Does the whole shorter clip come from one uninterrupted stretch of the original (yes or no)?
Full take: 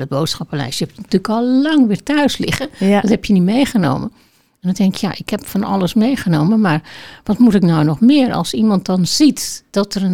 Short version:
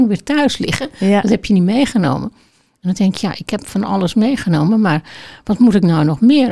yes